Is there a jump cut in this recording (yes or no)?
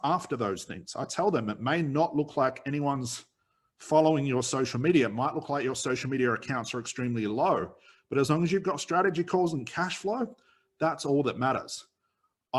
no